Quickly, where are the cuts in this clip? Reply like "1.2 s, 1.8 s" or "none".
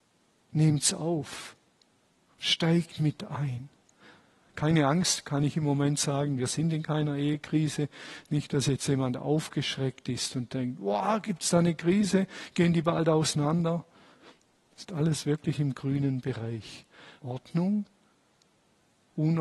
17.2 s